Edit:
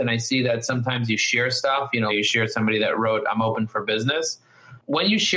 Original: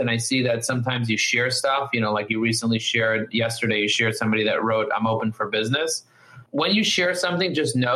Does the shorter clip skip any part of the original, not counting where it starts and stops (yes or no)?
yes